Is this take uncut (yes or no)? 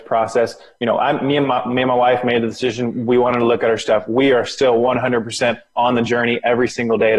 yes